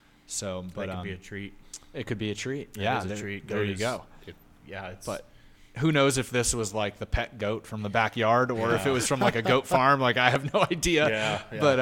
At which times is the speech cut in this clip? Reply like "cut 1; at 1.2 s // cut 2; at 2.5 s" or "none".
none

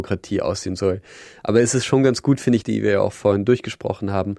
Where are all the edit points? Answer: cut 1; at 2.6 s

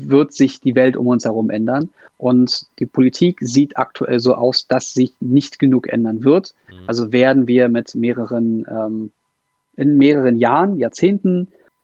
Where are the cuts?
none

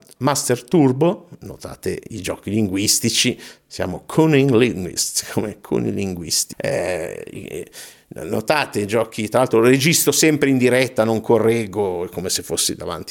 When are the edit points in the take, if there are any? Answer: cut 1; at 6.5 s

